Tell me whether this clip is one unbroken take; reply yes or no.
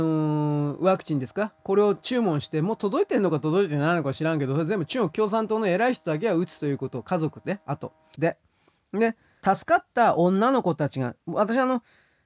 no